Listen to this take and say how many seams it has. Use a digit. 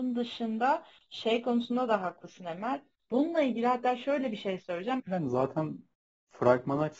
2